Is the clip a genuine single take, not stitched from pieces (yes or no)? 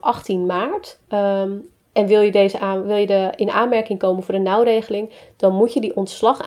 no